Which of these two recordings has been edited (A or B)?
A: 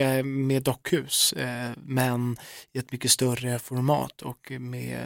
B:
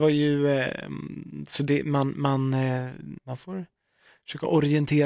B